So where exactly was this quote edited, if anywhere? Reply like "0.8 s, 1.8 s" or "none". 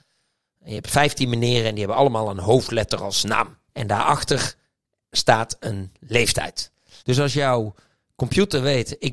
3.7 s, 7.0 s